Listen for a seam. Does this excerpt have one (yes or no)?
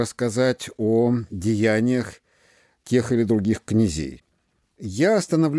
no